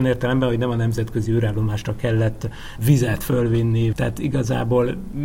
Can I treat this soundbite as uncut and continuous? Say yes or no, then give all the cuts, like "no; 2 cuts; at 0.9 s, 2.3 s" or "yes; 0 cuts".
no; 2 cuts; at 2.8 s, 3.9 s